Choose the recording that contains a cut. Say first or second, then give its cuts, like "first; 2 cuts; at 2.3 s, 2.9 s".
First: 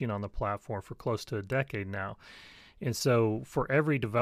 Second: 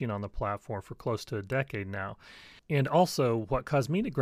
second; 1 cut; at 2.6 s